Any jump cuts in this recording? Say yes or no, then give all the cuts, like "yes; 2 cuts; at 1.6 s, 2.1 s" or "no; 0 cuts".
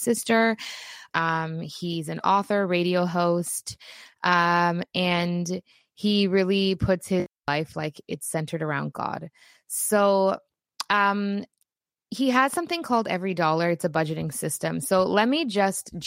yes; 1 cut; at 1.1 s